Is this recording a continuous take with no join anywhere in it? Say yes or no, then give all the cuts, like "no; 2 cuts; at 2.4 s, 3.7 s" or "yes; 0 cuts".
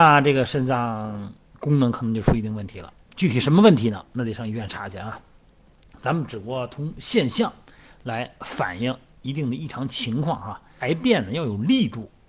no; 1 cut; at 10.8 s